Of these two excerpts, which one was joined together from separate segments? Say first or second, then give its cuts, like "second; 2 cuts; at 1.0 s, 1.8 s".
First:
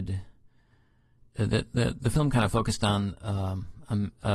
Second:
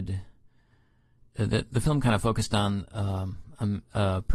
second; 1 cut; at 1.7 s